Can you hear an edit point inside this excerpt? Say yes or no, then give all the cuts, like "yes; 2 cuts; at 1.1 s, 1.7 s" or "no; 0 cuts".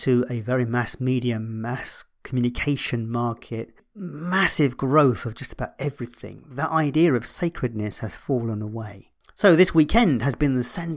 no; 0 cuts